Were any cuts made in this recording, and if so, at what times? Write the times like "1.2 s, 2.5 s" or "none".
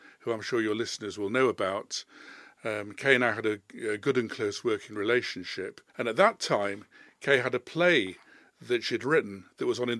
5.9 s